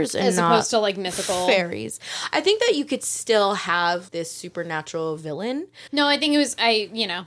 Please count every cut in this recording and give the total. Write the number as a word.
two